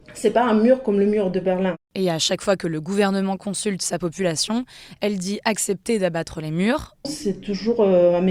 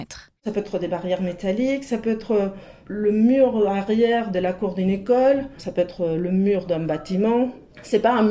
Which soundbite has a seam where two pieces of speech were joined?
first; 1 cut; at 7.0 s

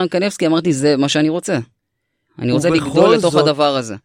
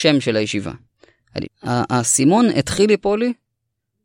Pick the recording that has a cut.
second; 1 cut; at 1.4 s

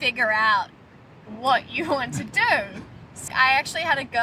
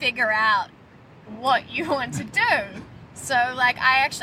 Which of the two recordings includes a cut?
first; 1 cut; at 3.3 s

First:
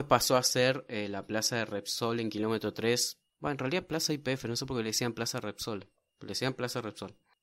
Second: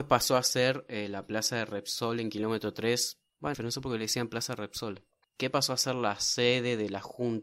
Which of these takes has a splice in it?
second; 2 cuts; at 3.5 s, 5.2 s

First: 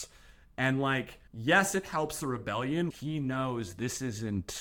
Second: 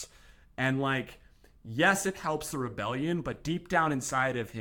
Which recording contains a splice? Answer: first; 2 cuts; at 1.3 s, 2.9 s

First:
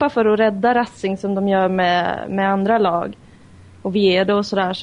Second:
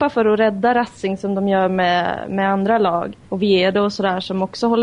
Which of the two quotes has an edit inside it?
second; 1 cut; at 3.3 s

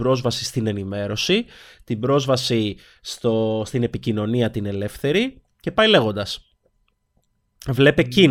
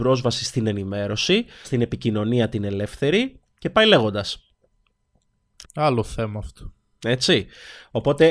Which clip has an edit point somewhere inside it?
second; 2 cuts; at 1.6 s, 5.6 s

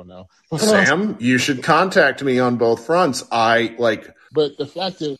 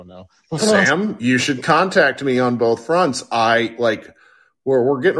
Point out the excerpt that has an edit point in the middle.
first; 1 cut; at 4.3 s

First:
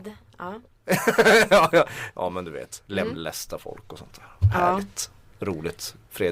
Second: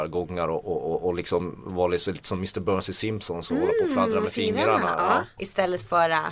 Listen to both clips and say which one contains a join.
second; 1 cut; at 5.4 s

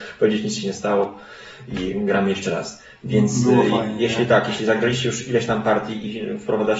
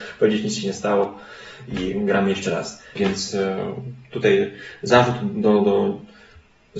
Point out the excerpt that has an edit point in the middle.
second; 1 cut; at 3.0 s

